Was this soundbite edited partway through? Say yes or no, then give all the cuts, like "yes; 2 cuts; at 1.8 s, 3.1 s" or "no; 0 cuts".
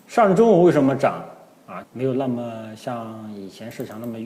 yes; 1 cut; at 1.8 s